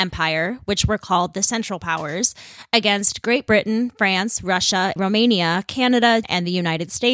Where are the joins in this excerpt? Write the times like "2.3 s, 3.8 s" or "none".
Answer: 5.0 s, 6.2 s